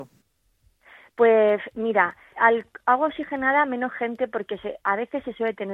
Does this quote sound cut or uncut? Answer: cut